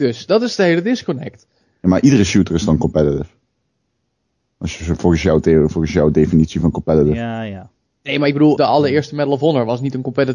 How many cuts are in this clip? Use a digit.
1